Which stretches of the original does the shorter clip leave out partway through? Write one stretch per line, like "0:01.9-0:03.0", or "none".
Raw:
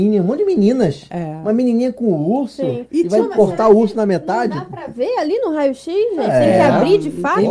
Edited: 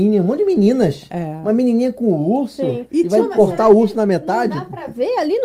none